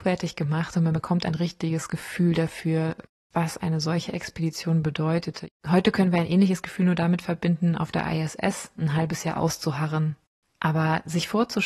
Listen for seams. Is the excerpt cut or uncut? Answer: uncut